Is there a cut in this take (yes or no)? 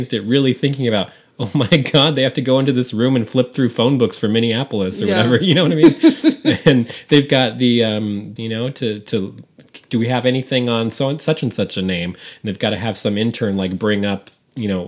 yes